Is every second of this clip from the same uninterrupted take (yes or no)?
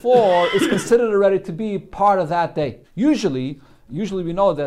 no